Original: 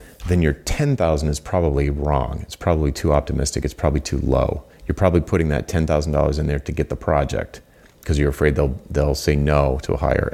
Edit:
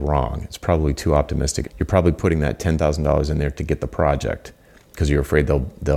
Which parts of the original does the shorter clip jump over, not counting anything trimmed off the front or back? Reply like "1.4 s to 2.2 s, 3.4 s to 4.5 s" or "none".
3.6 s to 4.7 s